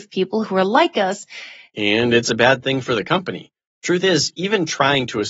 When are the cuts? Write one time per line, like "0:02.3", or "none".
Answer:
0:01.7